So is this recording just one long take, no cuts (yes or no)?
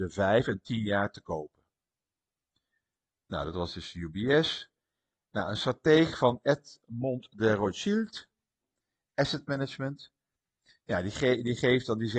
yes